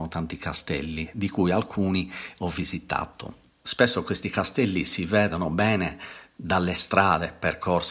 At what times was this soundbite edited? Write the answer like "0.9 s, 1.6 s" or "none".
3.5 s